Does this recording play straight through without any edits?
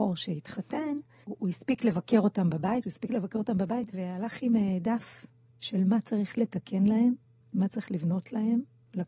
no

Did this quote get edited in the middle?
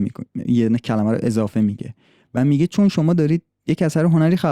no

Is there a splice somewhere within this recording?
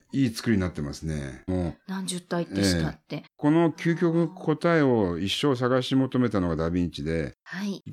yes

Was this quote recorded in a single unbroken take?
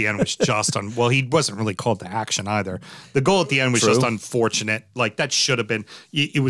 yes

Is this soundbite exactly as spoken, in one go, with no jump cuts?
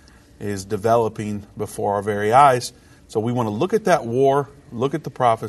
yes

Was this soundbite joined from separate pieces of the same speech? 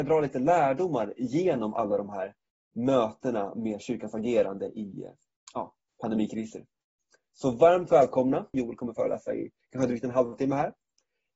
yes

